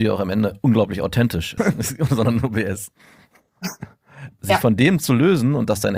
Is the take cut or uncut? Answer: cut